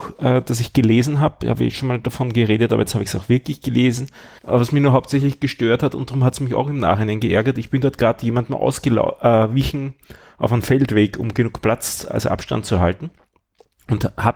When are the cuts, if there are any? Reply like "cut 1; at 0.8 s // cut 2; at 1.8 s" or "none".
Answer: cut 1; at 4.4 s